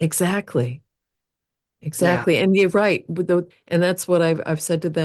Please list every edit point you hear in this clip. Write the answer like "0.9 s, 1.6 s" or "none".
3.5 s